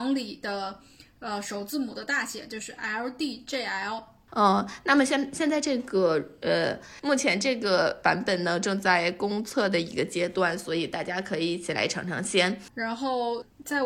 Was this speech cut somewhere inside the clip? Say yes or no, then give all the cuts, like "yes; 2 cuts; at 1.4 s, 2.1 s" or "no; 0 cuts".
yes; 1 cut; at 4.3 s